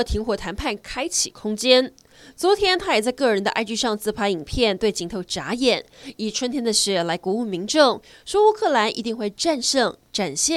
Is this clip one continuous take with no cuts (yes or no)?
yes